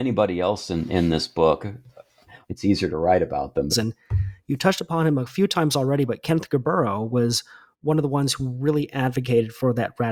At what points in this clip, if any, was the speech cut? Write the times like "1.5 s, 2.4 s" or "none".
2.4 s, 3.7 s